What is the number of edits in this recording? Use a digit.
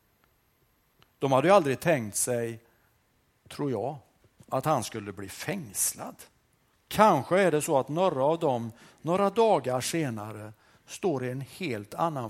1